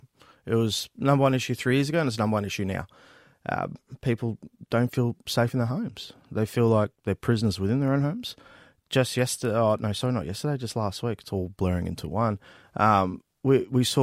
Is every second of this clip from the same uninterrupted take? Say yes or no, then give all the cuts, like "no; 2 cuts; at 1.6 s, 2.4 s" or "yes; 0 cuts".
yes; 0 cuts